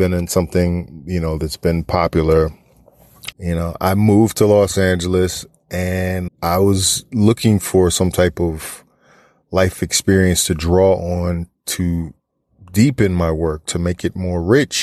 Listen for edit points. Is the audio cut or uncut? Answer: cut